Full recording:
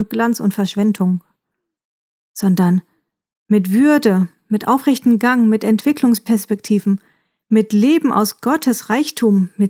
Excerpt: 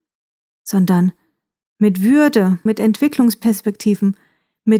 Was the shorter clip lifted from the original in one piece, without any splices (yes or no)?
no